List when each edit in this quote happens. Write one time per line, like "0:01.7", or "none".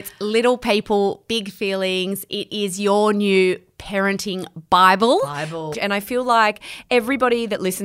0:05.7